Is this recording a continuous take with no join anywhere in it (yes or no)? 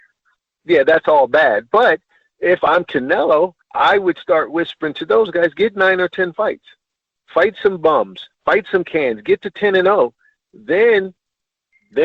no